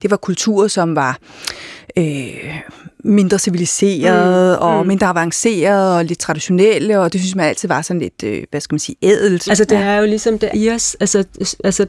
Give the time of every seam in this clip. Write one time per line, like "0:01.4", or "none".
0:09.5
0:10.5